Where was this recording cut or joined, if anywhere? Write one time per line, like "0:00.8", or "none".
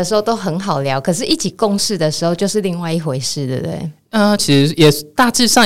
0:04.4